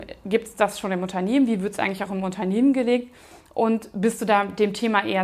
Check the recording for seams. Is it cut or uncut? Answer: uncut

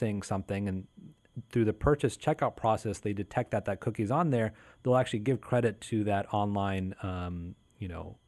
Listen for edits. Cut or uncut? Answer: uncut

